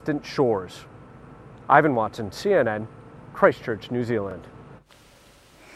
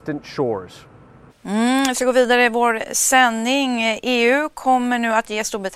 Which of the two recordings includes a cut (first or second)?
second